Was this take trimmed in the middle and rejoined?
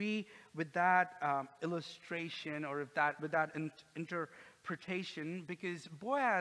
no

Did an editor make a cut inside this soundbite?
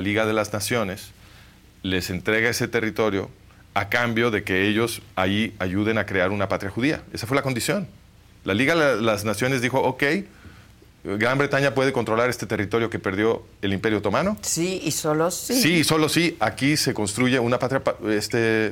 no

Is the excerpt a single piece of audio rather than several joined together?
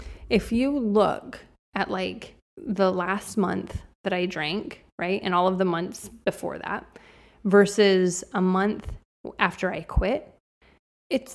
no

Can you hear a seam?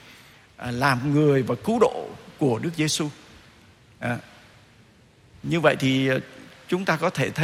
no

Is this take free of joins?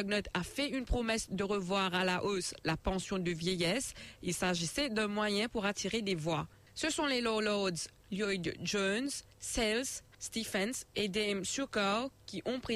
no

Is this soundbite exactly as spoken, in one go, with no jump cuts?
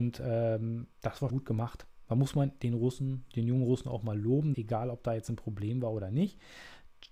no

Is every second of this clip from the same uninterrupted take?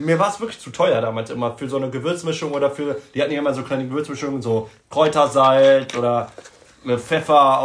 yes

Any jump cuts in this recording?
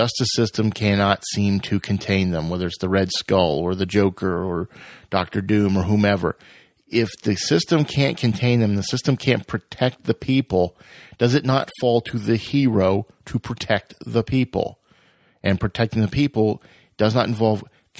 no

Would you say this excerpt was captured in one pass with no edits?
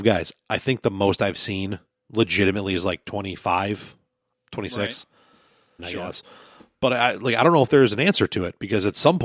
no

